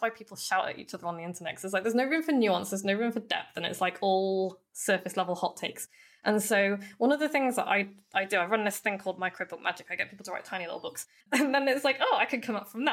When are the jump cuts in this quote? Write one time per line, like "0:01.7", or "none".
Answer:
0:11.2